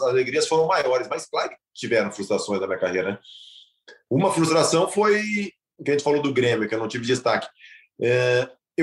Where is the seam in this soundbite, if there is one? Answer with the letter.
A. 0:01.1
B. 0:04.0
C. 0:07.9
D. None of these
D